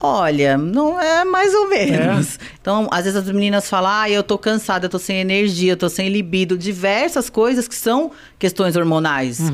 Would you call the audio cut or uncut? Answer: cut